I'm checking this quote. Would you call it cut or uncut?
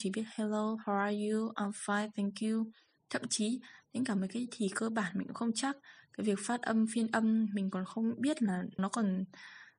cut